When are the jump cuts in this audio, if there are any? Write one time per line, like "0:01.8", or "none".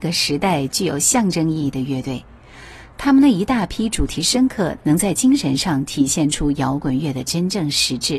0:04.8

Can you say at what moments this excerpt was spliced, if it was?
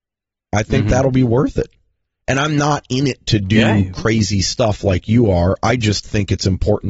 none

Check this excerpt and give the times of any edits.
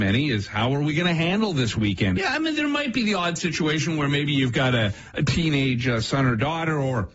0:02.2

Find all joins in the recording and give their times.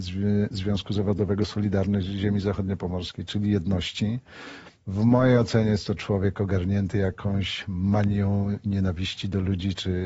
none

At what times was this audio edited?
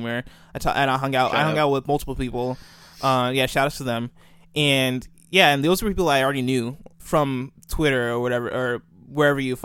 0:07.0

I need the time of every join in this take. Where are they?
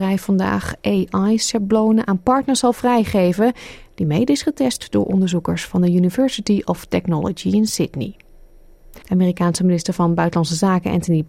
0:09.0

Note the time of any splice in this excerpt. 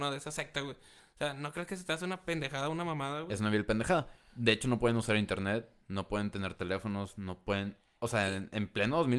none

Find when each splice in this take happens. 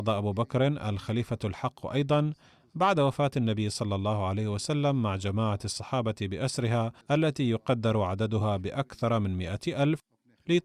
0:07.0

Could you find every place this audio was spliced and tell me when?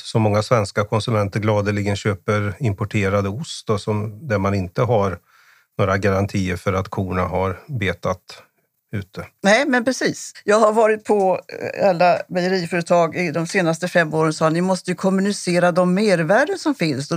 none

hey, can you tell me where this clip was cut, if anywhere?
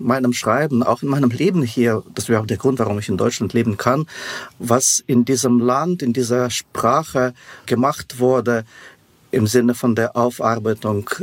none

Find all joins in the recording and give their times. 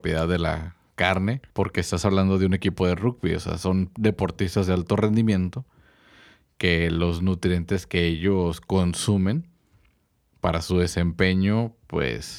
0:01.5

